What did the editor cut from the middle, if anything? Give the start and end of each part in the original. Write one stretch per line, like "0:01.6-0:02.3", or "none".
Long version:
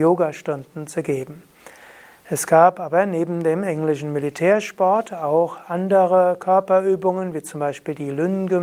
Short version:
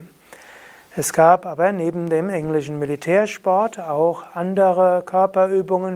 none